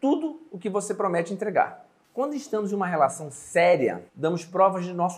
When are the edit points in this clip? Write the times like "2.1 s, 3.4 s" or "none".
4.1 s